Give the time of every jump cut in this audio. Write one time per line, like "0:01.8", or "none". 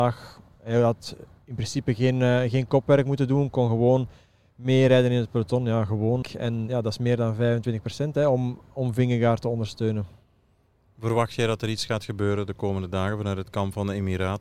0:06.2